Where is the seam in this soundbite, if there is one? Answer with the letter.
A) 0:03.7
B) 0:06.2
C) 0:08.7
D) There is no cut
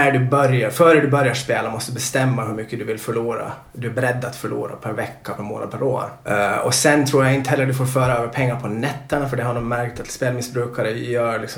B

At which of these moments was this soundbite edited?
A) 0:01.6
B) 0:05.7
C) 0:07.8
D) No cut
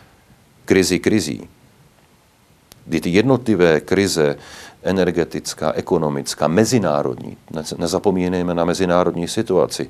D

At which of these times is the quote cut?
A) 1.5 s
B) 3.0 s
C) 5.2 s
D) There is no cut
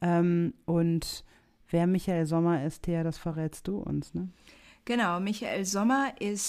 D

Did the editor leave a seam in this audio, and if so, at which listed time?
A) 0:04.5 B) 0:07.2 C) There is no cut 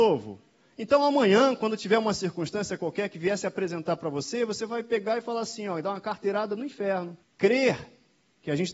B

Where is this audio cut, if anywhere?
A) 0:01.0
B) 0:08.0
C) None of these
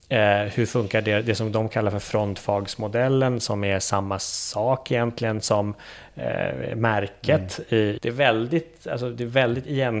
B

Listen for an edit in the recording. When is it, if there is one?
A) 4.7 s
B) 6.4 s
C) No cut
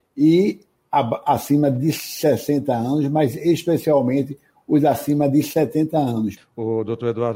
B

